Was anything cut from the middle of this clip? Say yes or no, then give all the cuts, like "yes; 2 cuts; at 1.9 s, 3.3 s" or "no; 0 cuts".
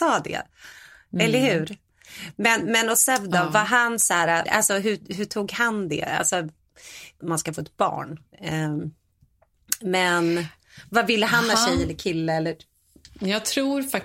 yes; 2 cuts; at 4.5 s, 7.2 s